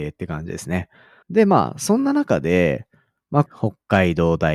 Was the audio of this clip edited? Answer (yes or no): yes